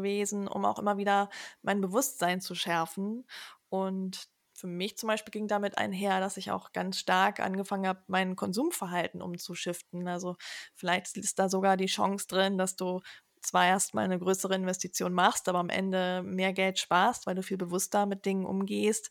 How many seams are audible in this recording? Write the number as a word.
zero